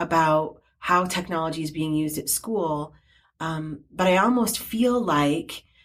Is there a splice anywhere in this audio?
no; 0 cuts

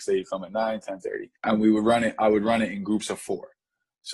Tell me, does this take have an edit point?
yes; 1 cut; at 1.3 s

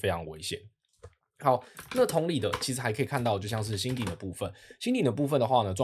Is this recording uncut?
yes; 0 cuts

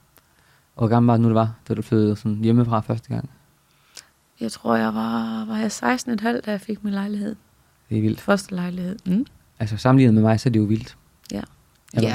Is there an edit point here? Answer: no; 0 cuts

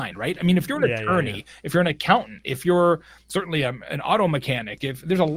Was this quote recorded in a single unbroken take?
yes; 0 cuts

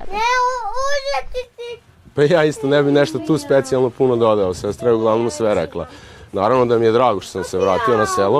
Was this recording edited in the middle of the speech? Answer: no; 0 cuts

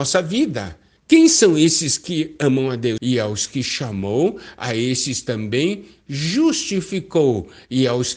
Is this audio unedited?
no; 2 cuts; at 1.0 s, 3.0 s

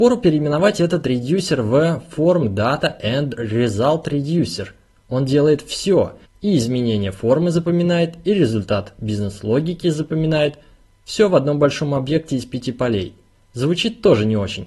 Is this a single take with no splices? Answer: yes; 0 cuts

